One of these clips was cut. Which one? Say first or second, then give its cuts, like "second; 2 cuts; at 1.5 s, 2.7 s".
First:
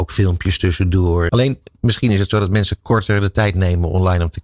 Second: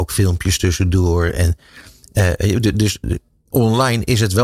first; 1 cut; at 1.3 s